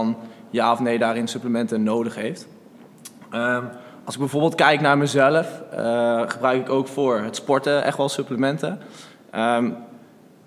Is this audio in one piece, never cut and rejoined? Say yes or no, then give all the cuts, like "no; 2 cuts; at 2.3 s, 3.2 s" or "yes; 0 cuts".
yes; 0 cuts